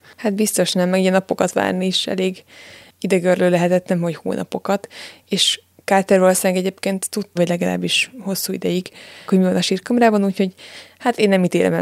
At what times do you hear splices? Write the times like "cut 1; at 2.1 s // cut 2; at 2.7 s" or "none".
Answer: cut 1; at 7.4 s // cut 2; at 9.3 s